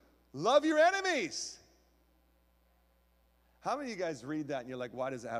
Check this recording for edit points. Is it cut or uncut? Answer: uncut